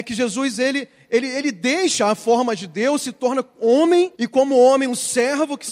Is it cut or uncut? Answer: cut